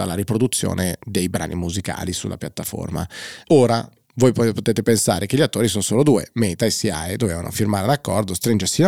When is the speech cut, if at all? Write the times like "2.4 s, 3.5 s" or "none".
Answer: 3.4 s